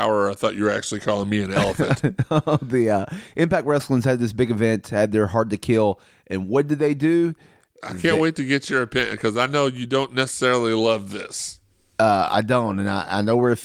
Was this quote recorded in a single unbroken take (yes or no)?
yes